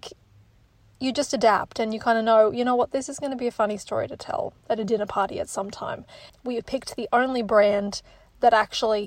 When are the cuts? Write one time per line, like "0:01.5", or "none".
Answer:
0:06.3